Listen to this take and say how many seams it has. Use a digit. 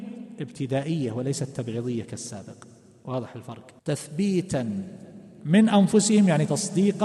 1